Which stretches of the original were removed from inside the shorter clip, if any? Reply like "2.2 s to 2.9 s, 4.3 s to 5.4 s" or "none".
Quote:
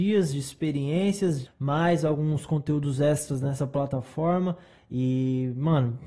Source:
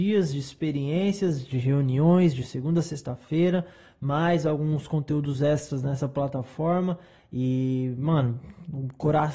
1.5 s to 3.9 s